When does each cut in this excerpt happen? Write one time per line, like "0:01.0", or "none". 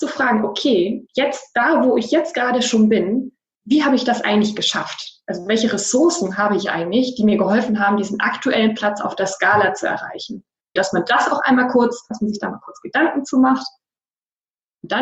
0:10.8
0:12.1